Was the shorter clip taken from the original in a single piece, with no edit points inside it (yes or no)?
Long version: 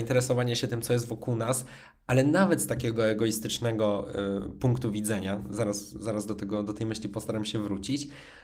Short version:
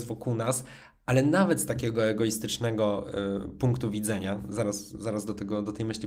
yes